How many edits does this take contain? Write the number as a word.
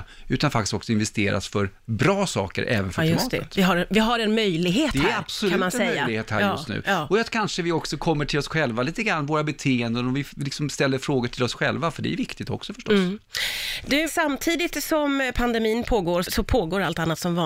two